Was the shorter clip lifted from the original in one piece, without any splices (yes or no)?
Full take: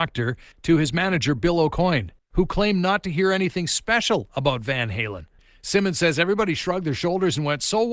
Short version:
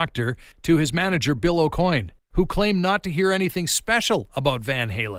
yes